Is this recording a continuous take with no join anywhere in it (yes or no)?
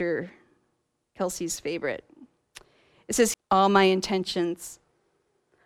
no